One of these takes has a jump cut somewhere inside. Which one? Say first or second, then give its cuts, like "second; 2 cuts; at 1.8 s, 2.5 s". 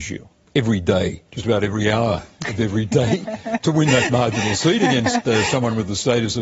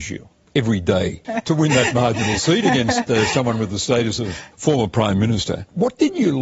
second; 1 cut; at 1.2 s